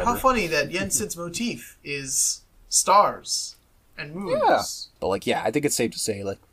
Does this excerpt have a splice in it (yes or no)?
yes